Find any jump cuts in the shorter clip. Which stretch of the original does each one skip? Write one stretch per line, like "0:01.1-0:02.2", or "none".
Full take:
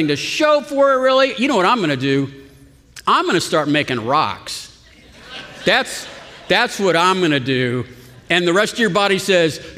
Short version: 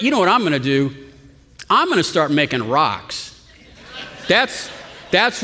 none

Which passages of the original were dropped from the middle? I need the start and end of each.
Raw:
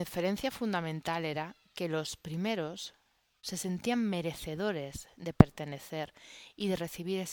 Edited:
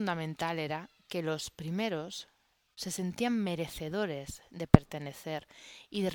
none

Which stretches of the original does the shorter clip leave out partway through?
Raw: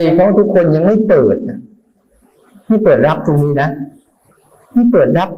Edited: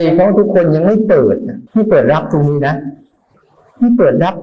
0:01.7-0:02.6

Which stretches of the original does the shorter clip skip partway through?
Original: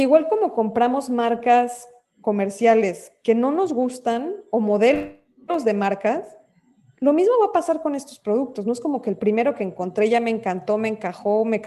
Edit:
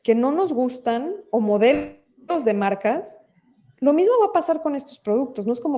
none

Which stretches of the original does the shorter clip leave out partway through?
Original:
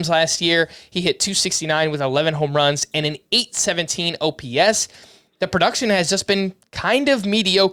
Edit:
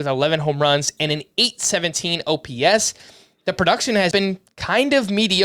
0:06.1-0:06.3

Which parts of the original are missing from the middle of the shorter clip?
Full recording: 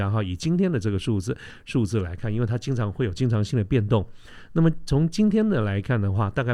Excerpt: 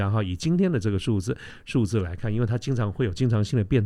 none

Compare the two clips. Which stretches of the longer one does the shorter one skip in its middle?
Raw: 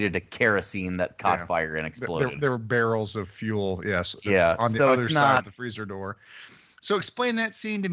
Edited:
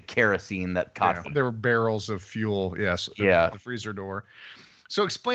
0:01.5-0:02.3
0:04.6-0:05.4

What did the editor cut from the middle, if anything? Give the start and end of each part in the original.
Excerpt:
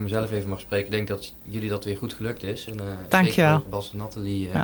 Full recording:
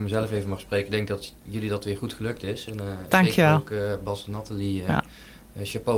0:03.7-0:04.0

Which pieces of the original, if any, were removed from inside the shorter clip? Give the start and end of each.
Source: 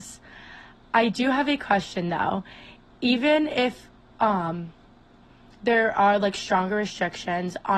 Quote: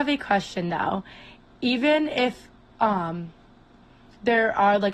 none

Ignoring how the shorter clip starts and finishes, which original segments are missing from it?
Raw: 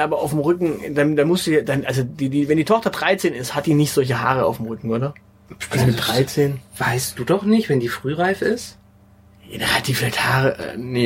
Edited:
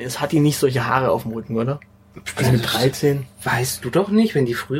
none

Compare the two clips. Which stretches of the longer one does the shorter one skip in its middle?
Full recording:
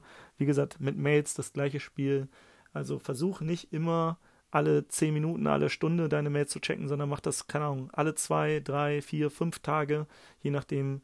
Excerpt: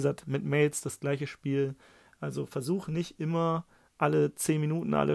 none

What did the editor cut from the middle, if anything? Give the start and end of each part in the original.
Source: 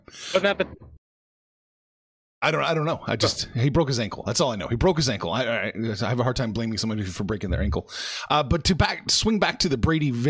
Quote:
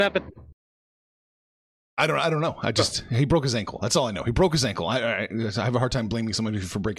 none

